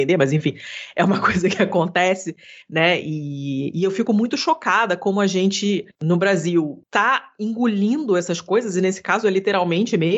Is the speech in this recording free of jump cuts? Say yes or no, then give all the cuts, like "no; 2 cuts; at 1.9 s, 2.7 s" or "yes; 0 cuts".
yes; 0 cuts